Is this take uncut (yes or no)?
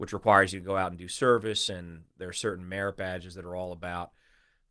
yes